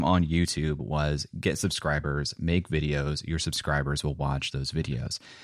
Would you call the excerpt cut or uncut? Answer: uncut